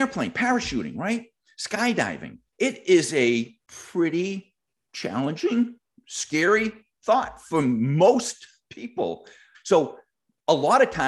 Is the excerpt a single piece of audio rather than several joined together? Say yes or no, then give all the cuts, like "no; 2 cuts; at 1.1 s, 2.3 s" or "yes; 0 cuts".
no; 2 cuts; at 2.5 s, 9.5 s